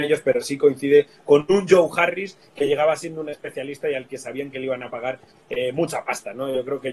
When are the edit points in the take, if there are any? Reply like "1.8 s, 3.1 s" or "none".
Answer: none